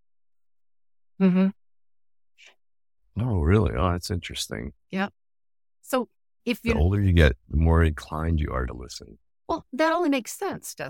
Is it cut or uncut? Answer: cut